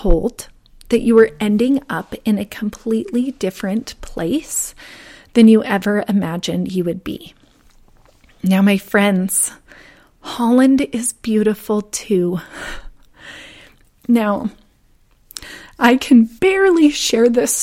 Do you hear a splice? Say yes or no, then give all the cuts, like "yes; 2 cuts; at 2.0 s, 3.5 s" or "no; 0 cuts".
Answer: yes; 1 cut; at 13.9 s